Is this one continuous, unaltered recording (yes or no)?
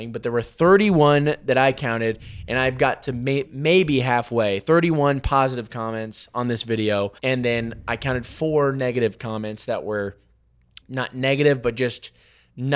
no